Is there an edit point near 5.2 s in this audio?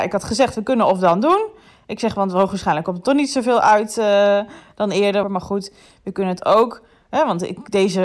yes; 1 cut; at 5.2 s

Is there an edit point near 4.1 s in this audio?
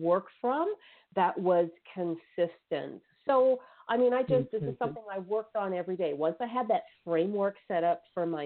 no; 0 cuts

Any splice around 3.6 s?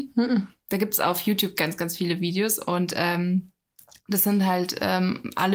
no; 0 cuts

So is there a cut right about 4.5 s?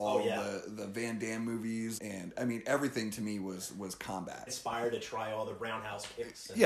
yes; 2 cuts; at 2.0 s, 4.5 s

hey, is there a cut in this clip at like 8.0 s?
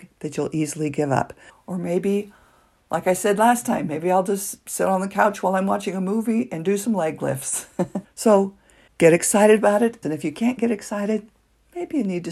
yes; 3 cuts; at 1.5 s, 8.0 s, 10.0 s

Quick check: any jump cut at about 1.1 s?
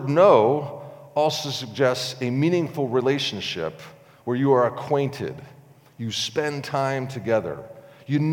no; 0 cuts

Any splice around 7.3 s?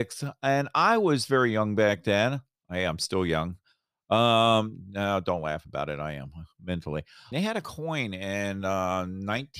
yes; 1 cut; at 7.3 s

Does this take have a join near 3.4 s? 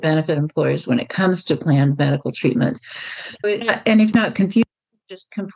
yes; 1 cut; at 3.4 s

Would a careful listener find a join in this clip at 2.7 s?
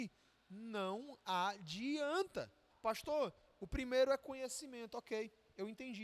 yes; 1 cut; at 2.7 s

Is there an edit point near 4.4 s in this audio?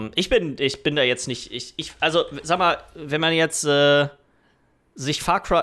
no; 0 cuts

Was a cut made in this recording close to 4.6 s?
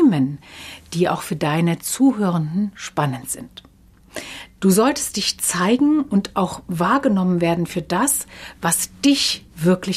yes; 1 cut; at 4.6 s

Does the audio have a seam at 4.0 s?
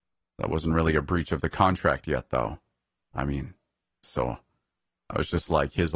yes; 1 cut; at 4.0 s

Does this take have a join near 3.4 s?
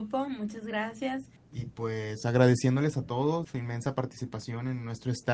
yes; 2 cuts; at 1.4 s, 3.4 s

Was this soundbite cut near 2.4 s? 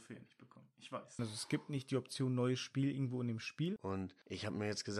no; 2 cuts; at 1.2 s, 3.8 s

